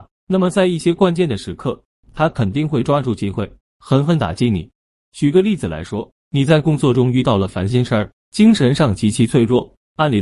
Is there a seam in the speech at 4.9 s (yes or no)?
no